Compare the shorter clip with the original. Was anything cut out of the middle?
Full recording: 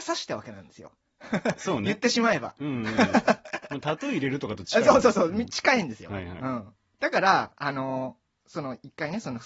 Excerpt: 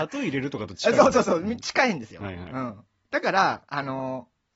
no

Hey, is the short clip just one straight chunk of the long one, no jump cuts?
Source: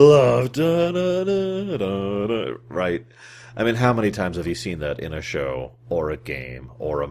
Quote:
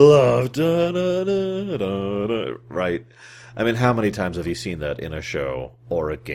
yes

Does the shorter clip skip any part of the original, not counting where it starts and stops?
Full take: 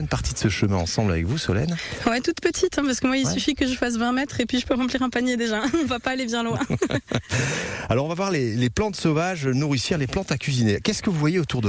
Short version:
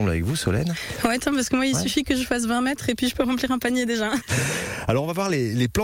yes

